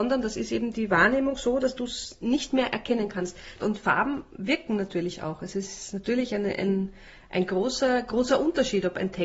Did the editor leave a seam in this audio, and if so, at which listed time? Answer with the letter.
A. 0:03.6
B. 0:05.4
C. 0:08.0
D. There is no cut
A